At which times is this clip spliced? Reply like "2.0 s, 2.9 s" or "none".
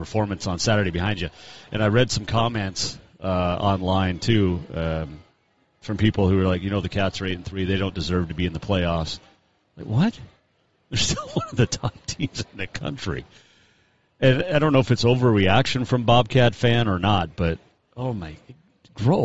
none